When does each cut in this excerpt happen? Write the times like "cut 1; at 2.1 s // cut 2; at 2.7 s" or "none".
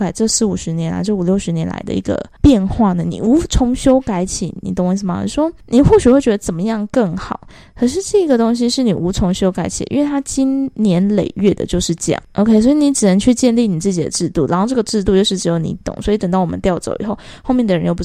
none